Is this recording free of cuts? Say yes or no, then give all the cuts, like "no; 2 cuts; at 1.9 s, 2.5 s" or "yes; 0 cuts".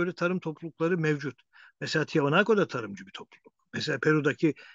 yes; 0 cuts